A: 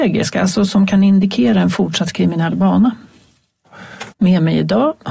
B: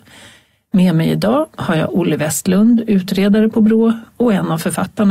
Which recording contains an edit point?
A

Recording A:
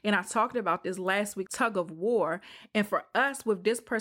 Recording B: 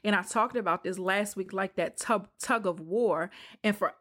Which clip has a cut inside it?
A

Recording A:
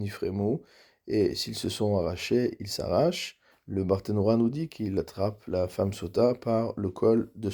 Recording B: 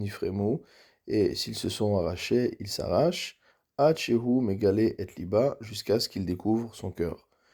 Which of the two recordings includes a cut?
A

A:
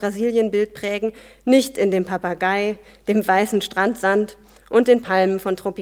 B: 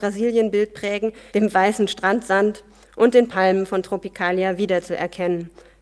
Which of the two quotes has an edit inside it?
B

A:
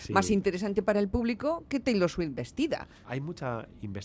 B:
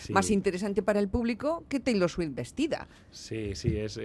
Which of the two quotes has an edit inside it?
A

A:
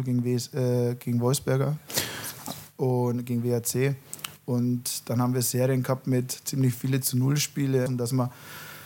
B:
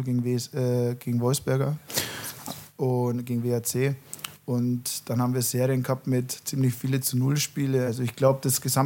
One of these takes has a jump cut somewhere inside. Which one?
A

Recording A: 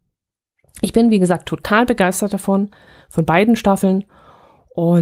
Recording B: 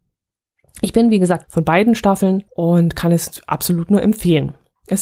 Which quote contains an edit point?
B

